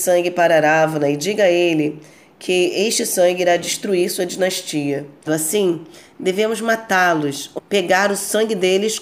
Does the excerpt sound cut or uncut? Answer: cut